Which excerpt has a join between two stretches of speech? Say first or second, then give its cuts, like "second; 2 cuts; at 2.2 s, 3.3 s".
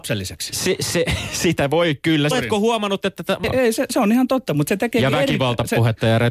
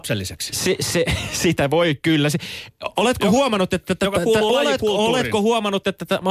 first; 2 cuts; at 2.3 s, 3.4 s